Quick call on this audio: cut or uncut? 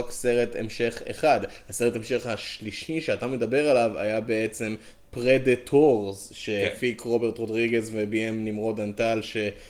uncut